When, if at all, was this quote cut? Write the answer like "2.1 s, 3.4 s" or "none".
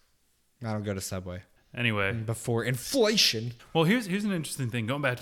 1.6 s, 3.6 s